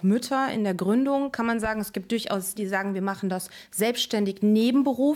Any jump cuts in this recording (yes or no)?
yes